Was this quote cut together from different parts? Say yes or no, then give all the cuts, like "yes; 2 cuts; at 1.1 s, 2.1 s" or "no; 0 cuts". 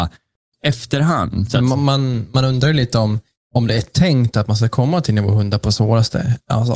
yes; 1 cut; at 1.5 s